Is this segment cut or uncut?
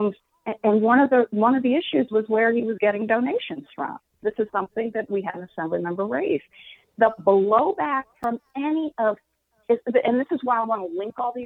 cut